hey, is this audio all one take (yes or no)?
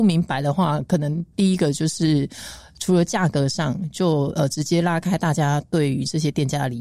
yes